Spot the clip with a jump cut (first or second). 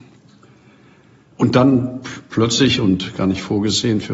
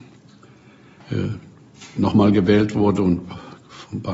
second